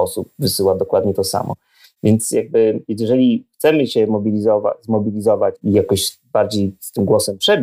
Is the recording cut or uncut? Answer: uncut